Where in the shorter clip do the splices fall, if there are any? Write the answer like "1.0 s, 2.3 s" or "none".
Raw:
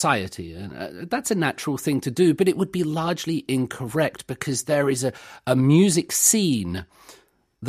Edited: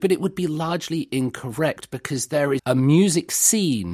2.6 s